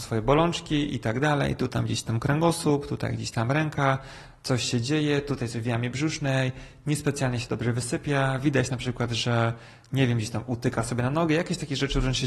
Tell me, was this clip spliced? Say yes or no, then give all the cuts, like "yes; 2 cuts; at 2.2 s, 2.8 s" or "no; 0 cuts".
no; 0 cuts